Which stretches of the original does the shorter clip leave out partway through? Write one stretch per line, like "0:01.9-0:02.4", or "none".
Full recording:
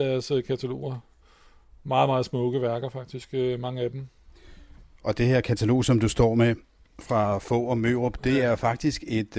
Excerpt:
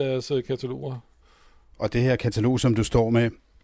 0:01.7-0:05.0